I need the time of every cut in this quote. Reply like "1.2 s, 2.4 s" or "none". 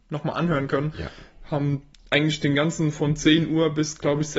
0.9 s